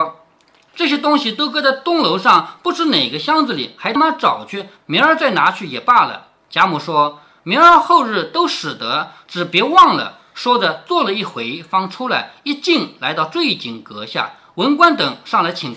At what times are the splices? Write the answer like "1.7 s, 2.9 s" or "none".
4.0 s

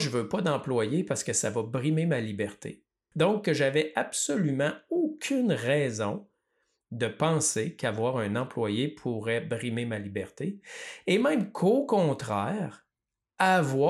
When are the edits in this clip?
3.1 s

